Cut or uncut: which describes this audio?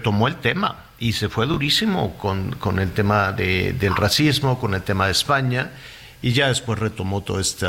uncut